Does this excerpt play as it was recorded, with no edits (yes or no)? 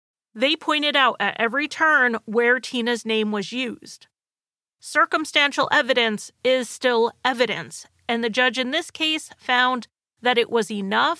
no